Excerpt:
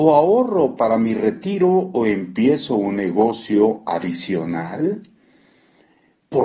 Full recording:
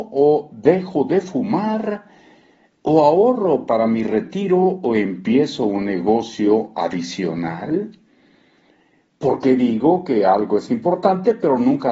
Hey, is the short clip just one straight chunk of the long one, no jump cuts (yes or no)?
yes